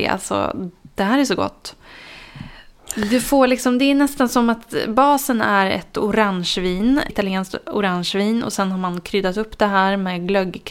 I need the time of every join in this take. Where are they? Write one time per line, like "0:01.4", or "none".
0:07.1